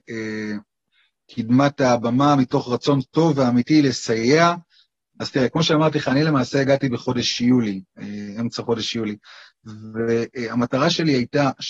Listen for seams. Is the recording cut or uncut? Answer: cut